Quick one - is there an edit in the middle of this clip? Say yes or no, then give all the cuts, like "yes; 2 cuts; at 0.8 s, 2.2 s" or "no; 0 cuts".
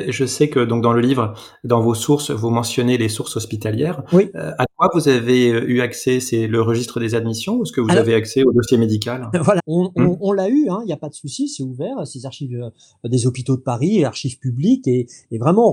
yes; 1 cut; at 9.6 s